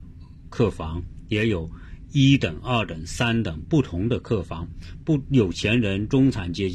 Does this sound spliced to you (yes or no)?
no